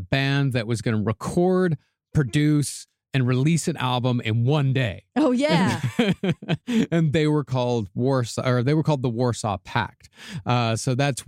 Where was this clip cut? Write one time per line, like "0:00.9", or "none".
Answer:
none